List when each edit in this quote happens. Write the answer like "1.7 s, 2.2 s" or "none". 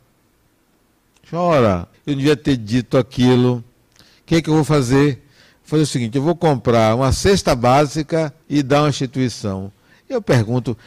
1.9 s, 8.4 s